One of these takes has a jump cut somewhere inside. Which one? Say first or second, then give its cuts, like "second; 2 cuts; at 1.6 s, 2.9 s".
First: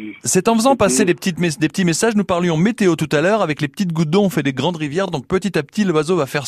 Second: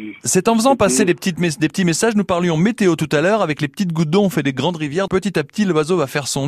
second; 1 cut; at 5.1 s